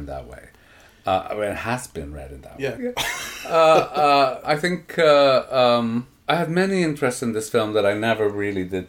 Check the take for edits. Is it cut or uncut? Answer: cut